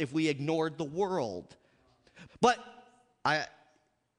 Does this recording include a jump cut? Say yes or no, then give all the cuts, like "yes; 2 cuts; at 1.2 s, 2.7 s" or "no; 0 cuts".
yes; 1 cut; at 2.3 s